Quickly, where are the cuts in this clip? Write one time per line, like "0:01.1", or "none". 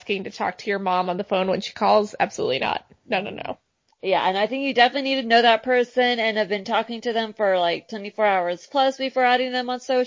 0:03.9